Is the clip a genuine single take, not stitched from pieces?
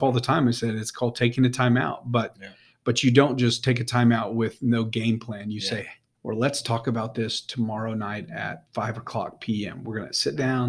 no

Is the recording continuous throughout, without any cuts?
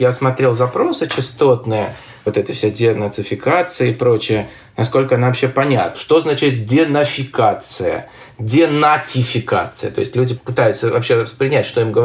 no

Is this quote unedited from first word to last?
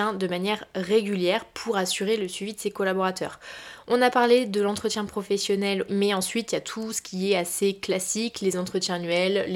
no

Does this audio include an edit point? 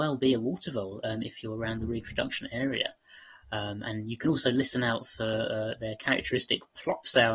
no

